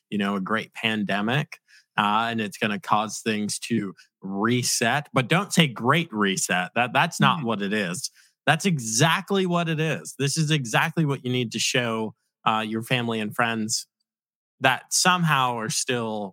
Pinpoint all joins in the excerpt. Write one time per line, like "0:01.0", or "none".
none